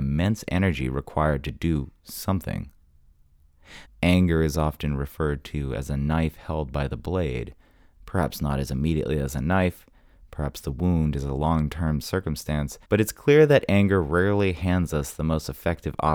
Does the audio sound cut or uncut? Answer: cut